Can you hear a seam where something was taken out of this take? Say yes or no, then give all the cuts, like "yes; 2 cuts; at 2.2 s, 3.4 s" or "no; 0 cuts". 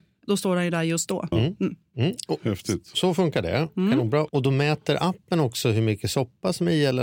yes; 1 cut; at 1.3 s